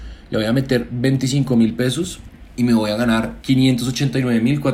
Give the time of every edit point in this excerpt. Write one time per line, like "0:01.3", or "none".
0:03.4